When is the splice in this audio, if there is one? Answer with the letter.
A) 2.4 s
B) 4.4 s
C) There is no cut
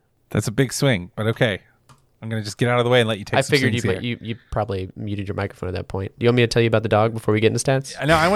C